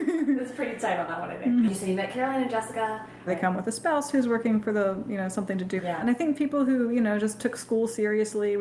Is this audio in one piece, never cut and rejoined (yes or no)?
no